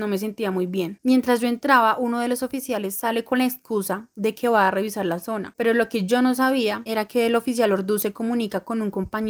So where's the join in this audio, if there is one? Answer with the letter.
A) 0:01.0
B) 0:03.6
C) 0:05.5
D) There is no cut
D